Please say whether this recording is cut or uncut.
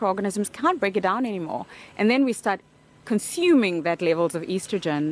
uncut